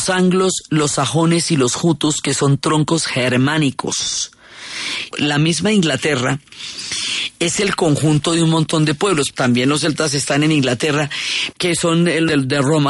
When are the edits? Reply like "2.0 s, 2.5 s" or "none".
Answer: 5.1 s, 9.3 s, 11.5 s